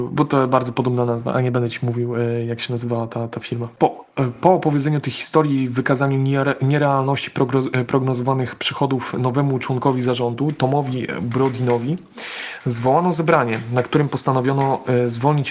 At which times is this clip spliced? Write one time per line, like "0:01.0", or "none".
none

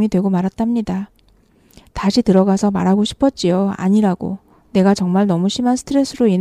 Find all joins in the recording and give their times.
none

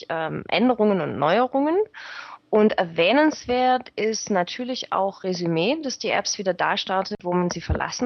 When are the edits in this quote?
none

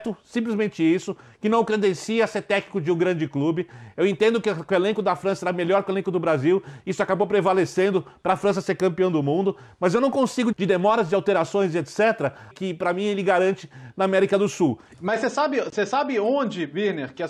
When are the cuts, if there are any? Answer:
0:10.5
0:12.5
0:14.9

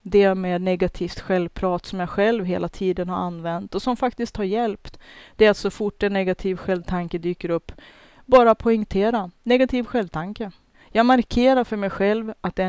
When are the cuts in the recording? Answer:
0:10.7

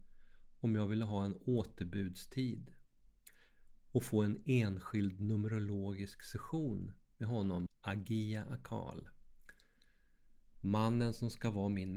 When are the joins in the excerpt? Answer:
0:07.7
0:10.5

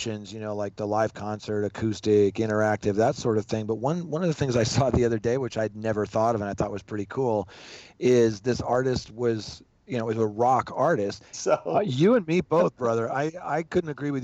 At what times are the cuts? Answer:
0:11.3

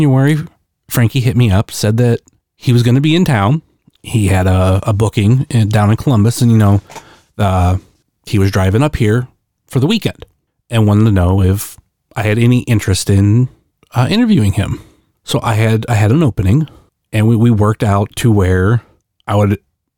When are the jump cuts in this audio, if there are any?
0:15.1

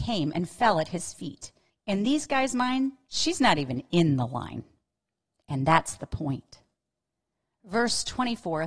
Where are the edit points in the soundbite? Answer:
0:01.7

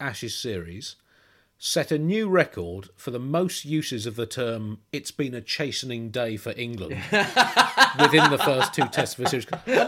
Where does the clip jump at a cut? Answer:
none

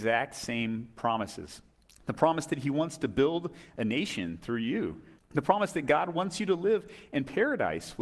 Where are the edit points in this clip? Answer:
0:05.2

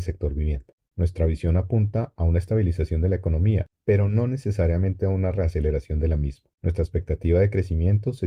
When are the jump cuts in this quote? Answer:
0:00.9

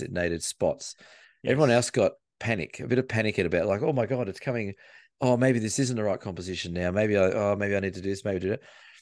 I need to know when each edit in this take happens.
none

